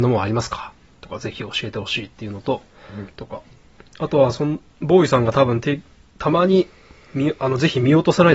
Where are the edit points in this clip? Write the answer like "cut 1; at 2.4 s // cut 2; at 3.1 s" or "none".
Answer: cut 1; at 3.1 s